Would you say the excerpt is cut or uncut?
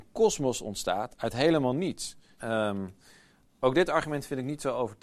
cut